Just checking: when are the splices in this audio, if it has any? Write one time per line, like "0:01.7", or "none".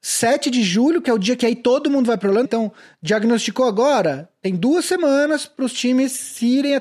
0:02.4

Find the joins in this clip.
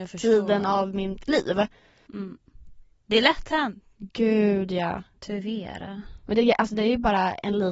0:02.1

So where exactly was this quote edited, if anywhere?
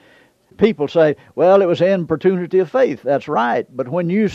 none

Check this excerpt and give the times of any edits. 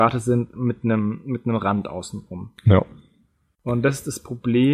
none

